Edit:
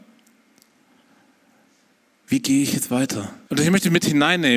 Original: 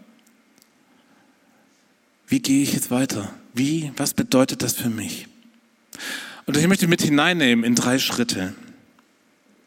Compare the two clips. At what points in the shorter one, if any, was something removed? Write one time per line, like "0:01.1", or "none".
0:03.5